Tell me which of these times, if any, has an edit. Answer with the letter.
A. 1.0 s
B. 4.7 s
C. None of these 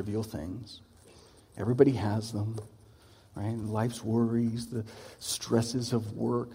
B